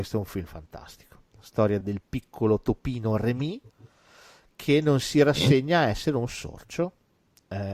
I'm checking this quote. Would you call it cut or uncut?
cut